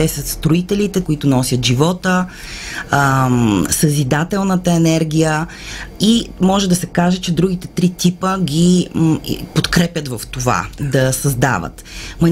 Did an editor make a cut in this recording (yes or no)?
yes